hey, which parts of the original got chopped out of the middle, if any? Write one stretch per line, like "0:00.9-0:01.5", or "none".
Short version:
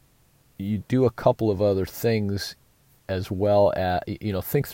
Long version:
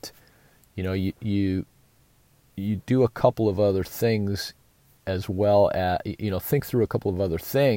none